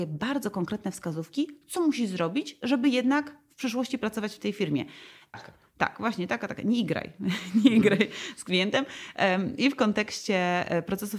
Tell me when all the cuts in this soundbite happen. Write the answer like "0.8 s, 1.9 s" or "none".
5.3 s